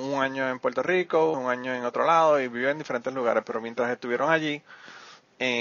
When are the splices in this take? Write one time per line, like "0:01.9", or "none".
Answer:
0:01.3